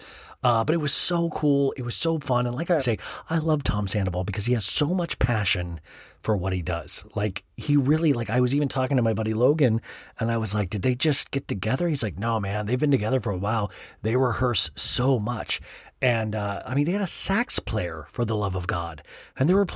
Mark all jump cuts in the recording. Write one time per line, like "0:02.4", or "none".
0:02.8